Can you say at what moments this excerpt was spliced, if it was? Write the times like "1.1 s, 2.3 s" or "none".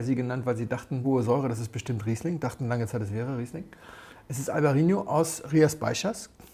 1.0 s